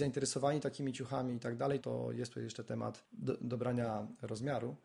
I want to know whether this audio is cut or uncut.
cut